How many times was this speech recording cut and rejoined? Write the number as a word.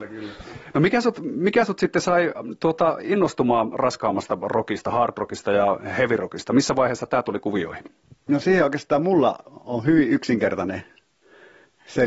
zero